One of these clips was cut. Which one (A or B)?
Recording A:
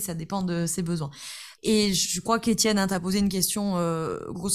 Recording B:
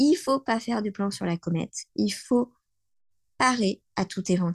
A